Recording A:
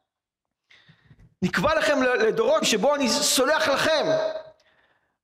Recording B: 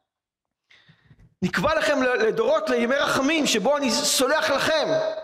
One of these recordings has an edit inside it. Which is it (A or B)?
A